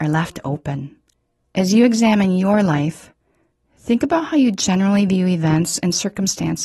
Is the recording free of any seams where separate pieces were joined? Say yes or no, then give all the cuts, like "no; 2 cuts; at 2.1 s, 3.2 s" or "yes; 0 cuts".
no; 1 cut; at 1.4 s